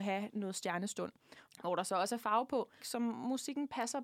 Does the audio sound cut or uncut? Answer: cut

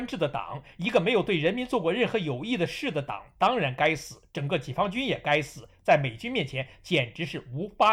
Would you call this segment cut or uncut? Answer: uncut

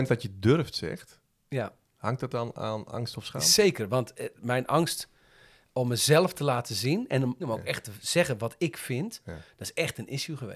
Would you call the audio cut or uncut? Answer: cut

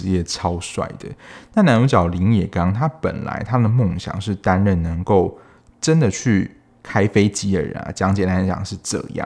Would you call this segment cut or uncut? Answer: uncut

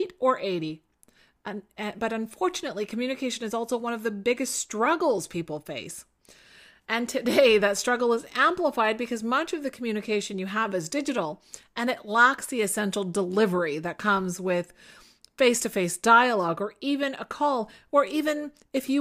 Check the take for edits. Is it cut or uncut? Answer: uncut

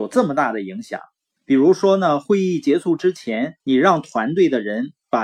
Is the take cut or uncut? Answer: cut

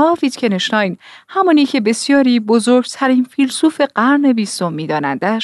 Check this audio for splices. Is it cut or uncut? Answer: uncut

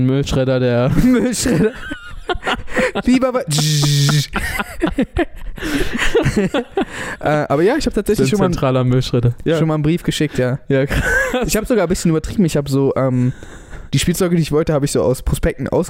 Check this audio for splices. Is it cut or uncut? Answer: uncut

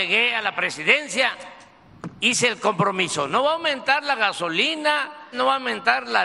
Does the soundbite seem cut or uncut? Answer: cut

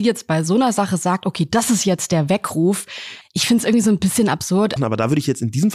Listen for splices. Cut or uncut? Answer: cut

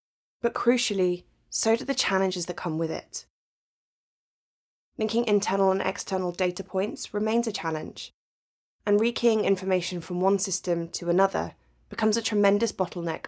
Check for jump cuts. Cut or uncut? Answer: uncut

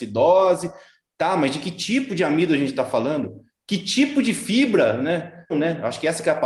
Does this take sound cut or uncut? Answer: cut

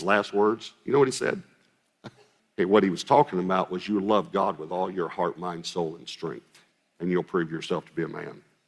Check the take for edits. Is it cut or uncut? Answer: cut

